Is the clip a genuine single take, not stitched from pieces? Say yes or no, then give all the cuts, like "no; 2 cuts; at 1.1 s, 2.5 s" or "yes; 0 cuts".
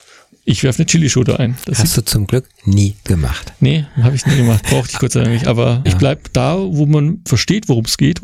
no; 2 cuts; at 5.9 s, 7.3 s